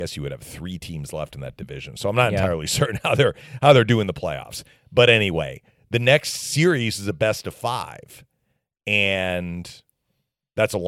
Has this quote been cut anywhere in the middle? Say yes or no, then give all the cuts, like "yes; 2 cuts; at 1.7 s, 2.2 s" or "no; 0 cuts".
no; 0 cuts